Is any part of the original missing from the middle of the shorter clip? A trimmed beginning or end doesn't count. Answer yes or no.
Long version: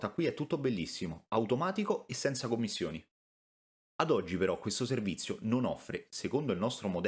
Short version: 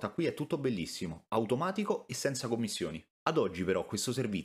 yes